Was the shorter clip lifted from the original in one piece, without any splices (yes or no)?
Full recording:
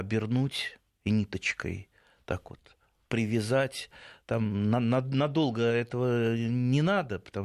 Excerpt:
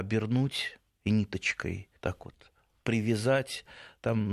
no